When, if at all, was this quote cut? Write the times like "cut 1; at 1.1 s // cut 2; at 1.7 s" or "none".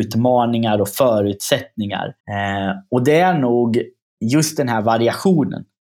cut 1; at 2.2 s